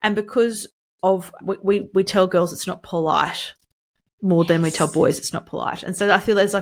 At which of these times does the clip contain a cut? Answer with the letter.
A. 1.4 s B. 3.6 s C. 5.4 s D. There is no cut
A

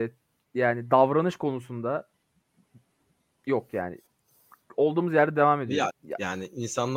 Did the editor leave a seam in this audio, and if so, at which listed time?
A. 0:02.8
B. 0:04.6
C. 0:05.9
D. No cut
C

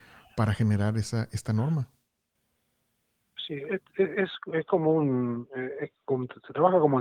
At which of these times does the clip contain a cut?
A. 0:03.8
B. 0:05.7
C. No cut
C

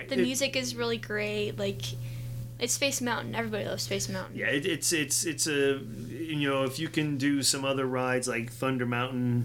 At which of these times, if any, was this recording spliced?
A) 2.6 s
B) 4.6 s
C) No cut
A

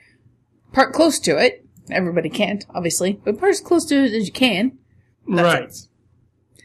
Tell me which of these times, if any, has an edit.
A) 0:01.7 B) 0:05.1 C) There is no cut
B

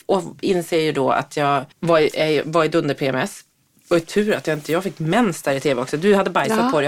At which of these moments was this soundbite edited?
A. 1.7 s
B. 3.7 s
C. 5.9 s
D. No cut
A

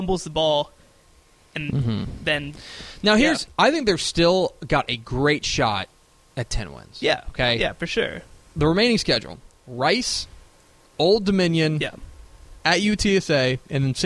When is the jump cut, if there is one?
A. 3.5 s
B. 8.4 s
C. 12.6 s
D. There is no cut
A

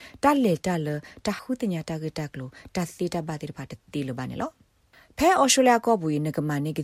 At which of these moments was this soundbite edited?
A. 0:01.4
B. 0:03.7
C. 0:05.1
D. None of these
A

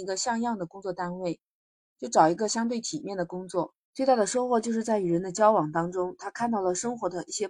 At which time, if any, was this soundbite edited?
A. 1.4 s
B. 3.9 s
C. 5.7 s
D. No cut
B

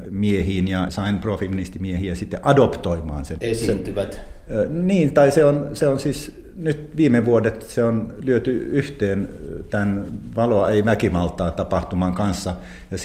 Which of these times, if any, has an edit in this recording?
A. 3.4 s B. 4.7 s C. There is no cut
A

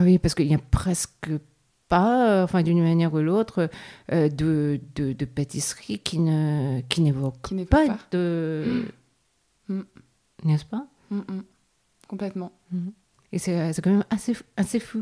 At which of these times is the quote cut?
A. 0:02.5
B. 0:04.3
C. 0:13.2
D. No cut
D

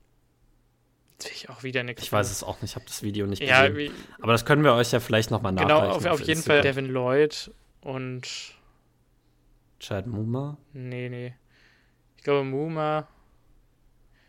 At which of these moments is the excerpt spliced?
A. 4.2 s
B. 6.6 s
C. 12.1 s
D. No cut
B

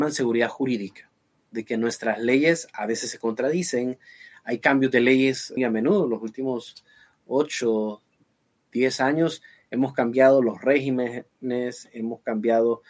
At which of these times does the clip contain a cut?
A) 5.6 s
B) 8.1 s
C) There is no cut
A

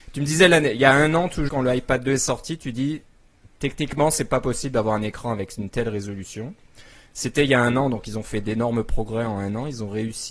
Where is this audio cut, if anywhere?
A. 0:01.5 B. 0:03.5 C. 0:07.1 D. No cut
A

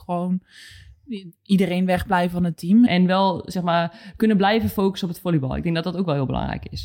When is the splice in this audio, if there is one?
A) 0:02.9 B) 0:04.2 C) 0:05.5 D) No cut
A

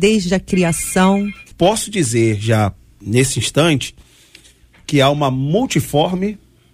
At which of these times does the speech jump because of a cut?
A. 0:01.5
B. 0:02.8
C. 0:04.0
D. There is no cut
A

